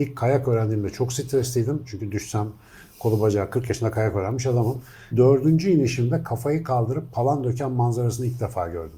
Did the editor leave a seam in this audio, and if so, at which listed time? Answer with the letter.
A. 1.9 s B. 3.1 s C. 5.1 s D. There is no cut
C